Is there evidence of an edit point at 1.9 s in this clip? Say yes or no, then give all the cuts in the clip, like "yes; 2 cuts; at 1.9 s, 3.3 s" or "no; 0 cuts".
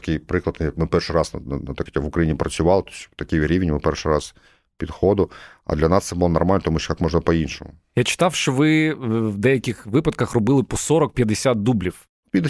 yes; 1 cut; at 1.9 s